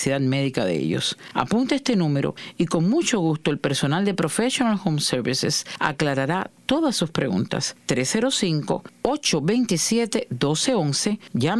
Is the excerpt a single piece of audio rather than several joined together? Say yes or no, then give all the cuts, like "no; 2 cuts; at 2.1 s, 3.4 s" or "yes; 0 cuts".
yes; 0 cuts